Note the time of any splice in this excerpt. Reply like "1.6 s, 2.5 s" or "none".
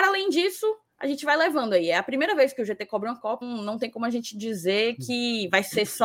3.4 s

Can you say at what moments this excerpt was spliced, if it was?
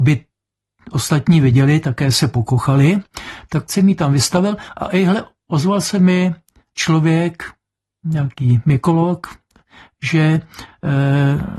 none

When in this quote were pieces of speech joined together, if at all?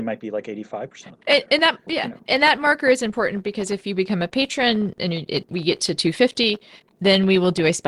1.9 s

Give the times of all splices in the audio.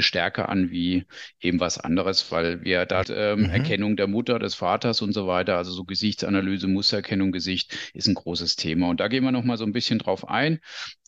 3.0 s

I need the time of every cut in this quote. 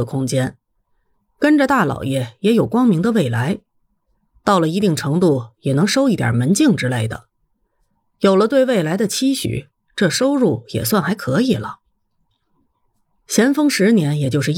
none

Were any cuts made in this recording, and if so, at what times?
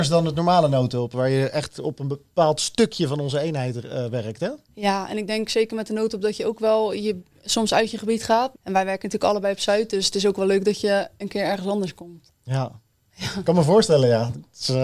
8.5 s

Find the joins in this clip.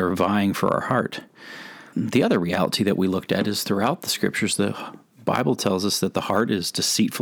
1.9 s

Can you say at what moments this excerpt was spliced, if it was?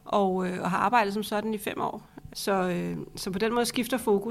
2.3 s

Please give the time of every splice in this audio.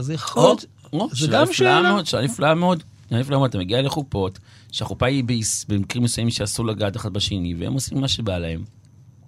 none

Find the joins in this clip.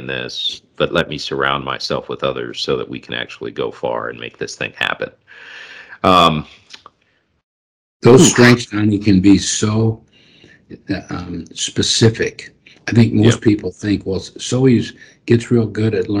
none

